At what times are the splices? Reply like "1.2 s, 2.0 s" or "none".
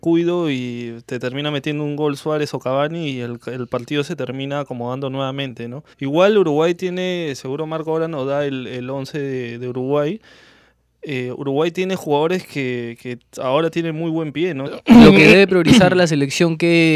5.9 s, 14.7 s